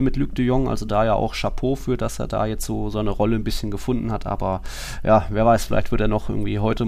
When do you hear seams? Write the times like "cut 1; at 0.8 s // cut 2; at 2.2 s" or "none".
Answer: none